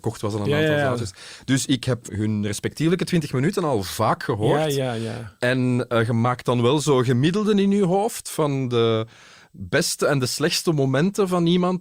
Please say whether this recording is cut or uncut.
uncut